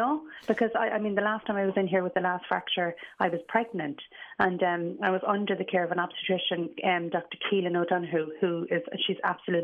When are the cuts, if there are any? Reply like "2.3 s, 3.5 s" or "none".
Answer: none